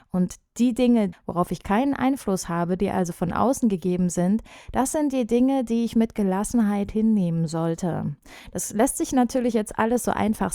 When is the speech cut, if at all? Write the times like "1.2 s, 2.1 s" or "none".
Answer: 1.1 s